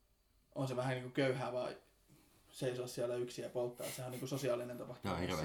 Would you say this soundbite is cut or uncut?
uncut